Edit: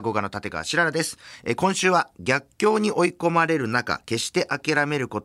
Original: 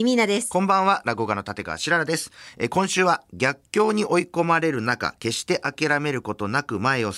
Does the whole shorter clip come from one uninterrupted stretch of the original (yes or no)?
yes